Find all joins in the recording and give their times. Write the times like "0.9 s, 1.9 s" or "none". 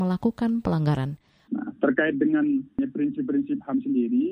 1.5 s